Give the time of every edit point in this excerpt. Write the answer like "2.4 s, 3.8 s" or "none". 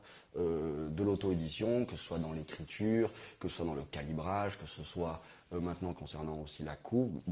none